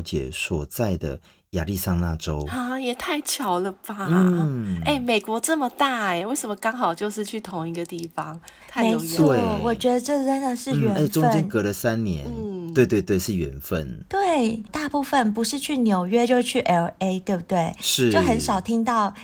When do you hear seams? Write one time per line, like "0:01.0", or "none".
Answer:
0:14.7

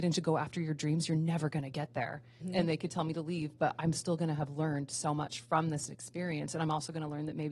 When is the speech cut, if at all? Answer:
0:02.4

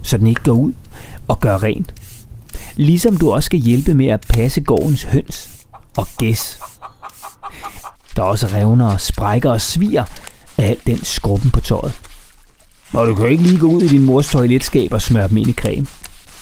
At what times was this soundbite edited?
0:07.9

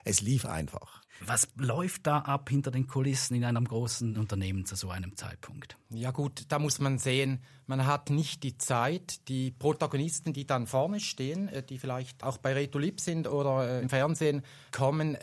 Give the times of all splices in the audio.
0:01.2

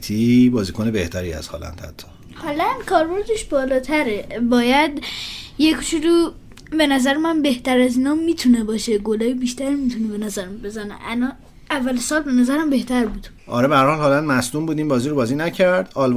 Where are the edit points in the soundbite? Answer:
none

